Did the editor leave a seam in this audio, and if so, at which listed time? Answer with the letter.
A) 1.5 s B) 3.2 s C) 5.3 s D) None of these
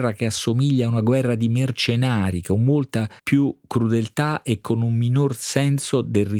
B